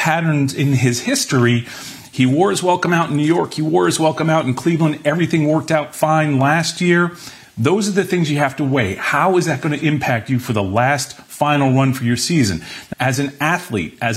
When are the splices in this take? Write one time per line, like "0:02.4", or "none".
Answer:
0:12.9